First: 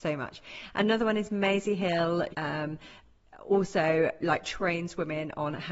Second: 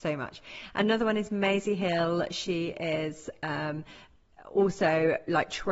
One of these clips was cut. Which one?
first; 1 cut; at 2.3 s

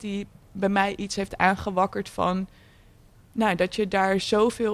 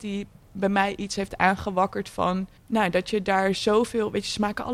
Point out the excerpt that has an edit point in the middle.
second; 1 cut; at 2.6 s

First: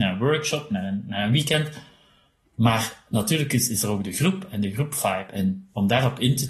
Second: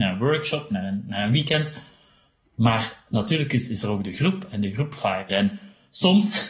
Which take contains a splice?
second; 1 cut; at 5.3 s

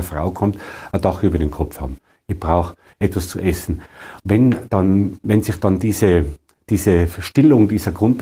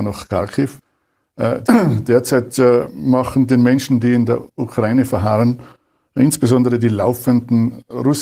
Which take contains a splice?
second; 1 cut; at 1.6 s

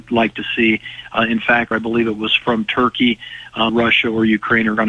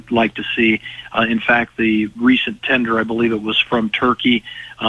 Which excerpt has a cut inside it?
first; 2 cuts; at 1.7 s, 3.7 s

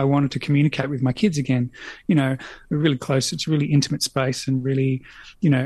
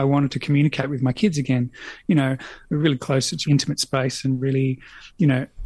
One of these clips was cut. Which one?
second; 1 cut; at 3.5 s

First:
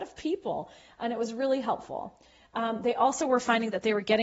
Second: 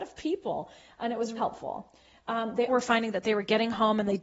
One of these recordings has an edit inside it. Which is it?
second; 2 cuts; at 1.4 s, 2.7 s

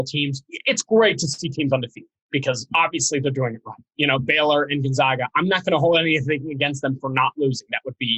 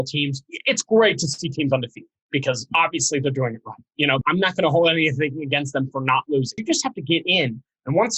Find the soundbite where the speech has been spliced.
second; 2 cuts; at 4.2 s, 6.6 s

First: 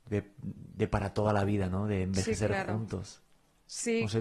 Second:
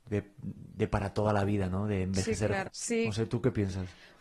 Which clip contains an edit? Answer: second; 1 cut; at 2.6 s

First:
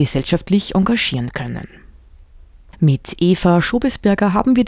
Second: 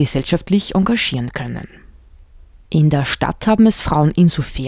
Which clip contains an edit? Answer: second; 1 cut; at 2.7 s

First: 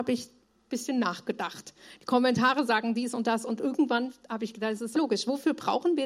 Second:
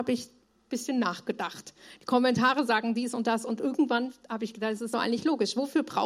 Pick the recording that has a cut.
first; 1 cut; at 4.9 s

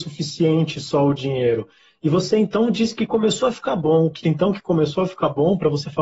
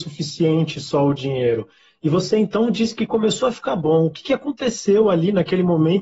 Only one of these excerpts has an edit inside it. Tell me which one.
first; 1 cut; at 4.2 s

